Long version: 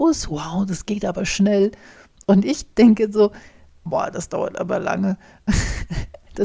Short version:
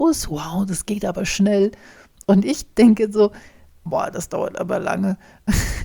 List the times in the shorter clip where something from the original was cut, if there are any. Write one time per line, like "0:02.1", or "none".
none